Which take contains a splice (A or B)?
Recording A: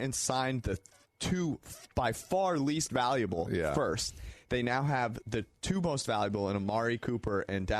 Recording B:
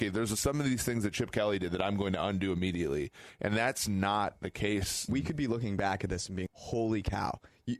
B